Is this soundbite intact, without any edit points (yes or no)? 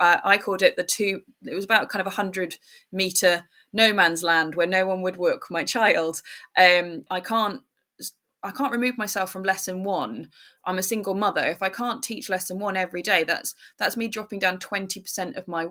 no